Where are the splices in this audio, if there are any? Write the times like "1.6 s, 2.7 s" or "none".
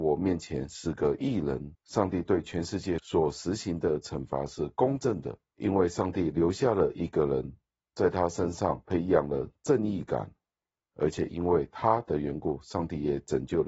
1.7 s